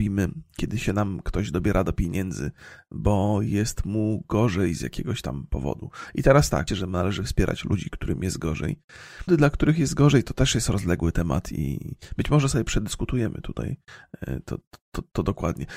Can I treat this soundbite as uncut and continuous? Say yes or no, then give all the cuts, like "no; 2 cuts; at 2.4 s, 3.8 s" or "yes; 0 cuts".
no; 2 cuts; at 6.7 s, 9.3 s